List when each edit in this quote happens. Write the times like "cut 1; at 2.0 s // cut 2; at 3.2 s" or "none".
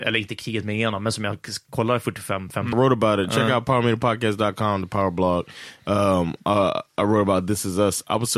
cut 1; at 2.7 s